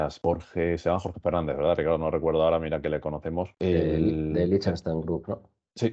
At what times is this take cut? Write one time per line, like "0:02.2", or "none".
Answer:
none